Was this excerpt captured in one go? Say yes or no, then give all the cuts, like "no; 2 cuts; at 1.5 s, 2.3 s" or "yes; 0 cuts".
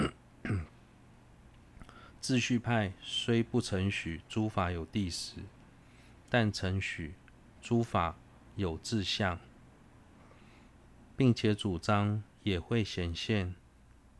no; 1 cut; at 12.3 s